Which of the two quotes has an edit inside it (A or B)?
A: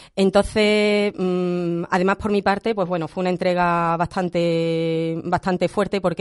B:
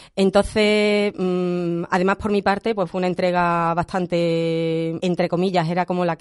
B